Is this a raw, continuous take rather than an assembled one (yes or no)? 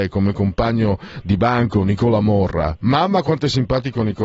yes